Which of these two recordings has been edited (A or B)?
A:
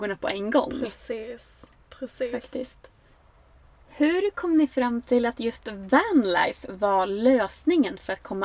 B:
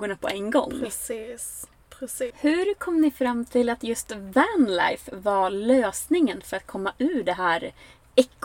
B